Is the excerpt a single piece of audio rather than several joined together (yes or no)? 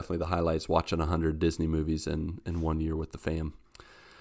yes